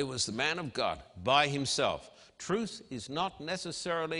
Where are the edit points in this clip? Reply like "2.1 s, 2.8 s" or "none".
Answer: none